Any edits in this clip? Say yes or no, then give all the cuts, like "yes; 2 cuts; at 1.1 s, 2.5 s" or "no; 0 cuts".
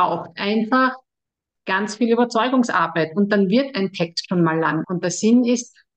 yes; 1 cut; at 4.8 s